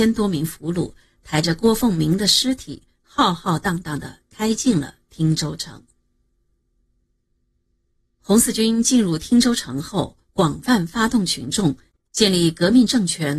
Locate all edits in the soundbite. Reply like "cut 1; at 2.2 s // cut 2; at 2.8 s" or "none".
none